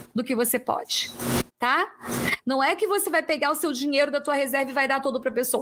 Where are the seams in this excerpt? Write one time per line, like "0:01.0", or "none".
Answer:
none